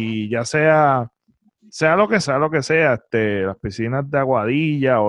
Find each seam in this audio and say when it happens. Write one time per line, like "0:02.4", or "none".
0:02.2